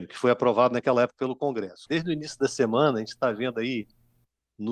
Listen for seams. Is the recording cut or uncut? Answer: cut